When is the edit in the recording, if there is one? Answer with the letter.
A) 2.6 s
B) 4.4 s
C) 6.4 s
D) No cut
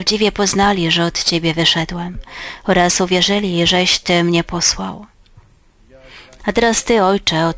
C